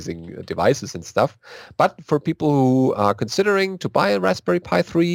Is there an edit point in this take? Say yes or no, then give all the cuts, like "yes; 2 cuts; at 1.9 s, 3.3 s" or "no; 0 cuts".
no; 0 cuts